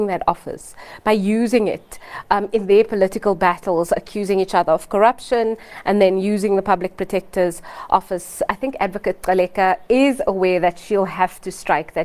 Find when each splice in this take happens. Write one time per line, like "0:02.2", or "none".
0:08.5

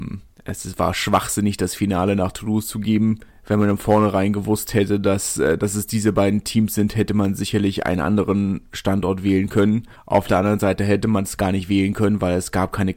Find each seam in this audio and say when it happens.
none

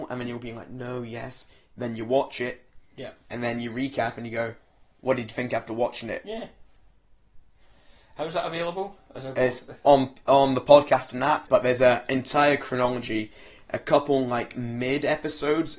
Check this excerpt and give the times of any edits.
0:11.5

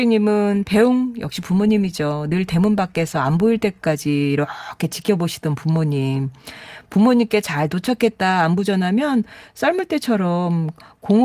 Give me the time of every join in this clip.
none

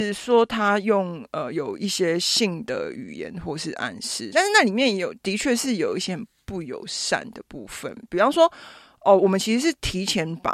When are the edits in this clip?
none

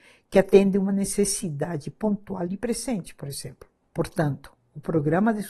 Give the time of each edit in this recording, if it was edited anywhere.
none

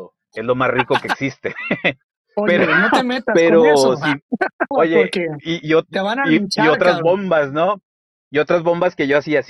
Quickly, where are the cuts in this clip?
0:04.7

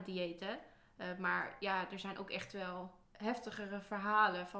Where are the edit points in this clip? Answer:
0:03.0

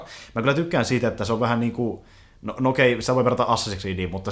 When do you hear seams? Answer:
none

